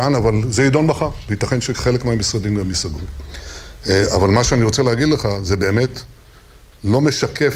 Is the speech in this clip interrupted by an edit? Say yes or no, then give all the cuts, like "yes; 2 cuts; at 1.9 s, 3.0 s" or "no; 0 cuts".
no; 0 cuts